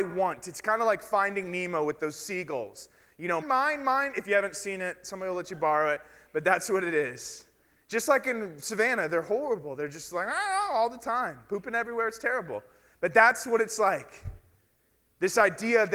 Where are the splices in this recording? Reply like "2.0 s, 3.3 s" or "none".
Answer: 3.4 s